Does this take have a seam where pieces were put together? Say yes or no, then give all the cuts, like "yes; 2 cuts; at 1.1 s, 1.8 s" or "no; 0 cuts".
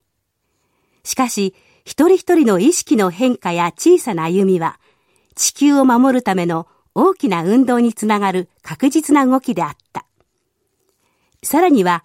no; 0 cuts